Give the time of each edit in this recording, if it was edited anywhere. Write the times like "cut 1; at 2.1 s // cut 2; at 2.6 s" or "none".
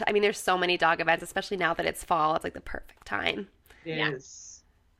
none